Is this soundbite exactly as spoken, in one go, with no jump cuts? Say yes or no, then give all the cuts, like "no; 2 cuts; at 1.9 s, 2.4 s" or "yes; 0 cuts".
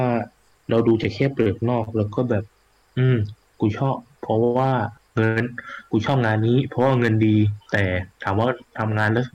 yes; 0 cuts